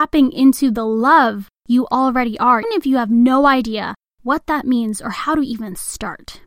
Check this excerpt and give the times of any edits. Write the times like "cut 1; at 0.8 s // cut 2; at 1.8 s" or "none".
cut 1; at 2.6 s